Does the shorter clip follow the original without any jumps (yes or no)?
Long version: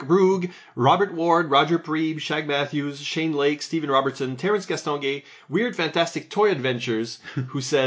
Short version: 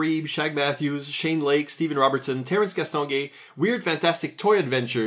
yes